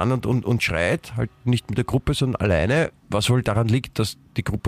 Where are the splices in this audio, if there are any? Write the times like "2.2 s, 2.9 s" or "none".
3.0 s